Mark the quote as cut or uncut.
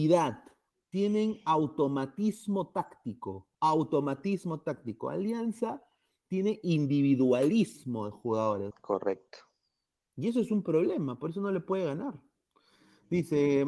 cut